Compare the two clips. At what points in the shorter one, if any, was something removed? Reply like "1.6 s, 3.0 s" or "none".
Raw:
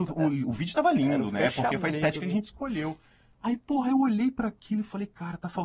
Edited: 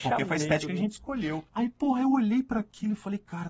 1.5 s